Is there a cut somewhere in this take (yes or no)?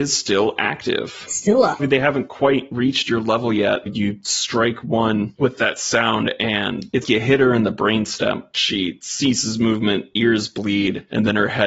yes